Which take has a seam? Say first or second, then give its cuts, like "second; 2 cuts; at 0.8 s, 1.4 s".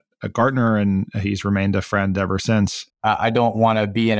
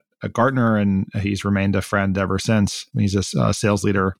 first; 1 cut; at 2.9 s